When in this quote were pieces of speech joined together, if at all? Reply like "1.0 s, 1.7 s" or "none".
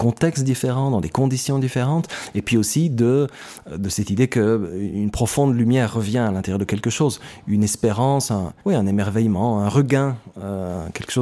8.6 s